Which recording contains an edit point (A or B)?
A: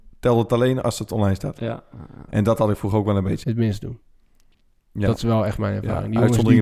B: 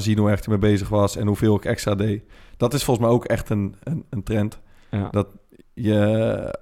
A